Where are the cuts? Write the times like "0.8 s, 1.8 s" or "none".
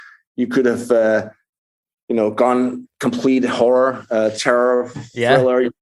none